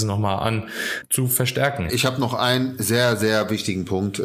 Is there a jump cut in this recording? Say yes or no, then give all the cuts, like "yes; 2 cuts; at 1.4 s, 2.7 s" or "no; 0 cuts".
yes; 1 cut; at 1.9 s